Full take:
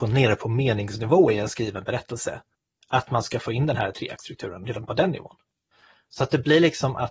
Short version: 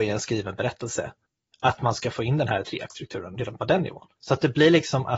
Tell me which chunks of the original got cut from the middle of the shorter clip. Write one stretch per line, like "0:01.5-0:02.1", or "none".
0:05.4-0:06.0